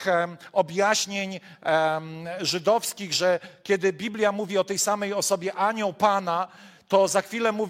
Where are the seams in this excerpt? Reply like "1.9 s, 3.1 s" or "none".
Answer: none